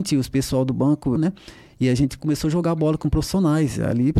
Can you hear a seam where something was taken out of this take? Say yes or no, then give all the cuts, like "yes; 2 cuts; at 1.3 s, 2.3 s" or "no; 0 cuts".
yes; 1 cut; at 1.2 s